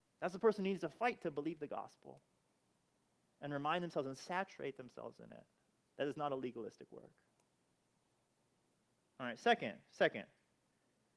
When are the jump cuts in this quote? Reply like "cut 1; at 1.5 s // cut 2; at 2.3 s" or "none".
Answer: cut 1; at 5.8 s